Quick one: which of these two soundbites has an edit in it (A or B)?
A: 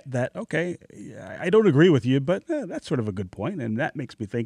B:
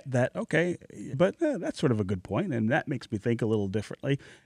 B